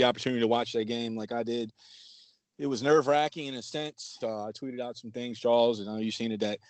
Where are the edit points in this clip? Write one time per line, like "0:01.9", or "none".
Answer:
0:04.2